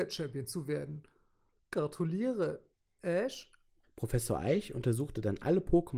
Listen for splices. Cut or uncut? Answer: cut